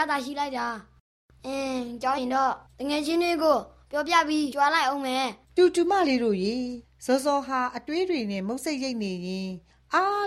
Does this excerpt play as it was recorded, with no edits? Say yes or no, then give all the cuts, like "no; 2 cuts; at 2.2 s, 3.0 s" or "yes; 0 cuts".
no; 2 cuts; at 2.2 s, 5.4 s